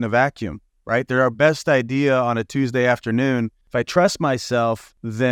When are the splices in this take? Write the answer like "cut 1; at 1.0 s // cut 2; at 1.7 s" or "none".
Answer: cut 1; at 3.6 s